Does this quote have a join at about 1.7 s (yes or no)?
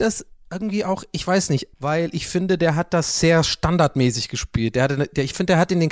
yes